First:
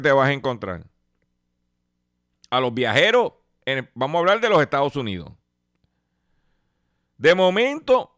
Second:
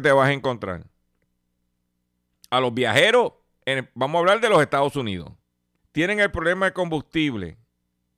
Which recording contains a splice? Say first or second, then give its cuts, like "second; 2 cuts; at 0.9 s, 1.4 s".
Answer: second; 1 cut; at 5.8 s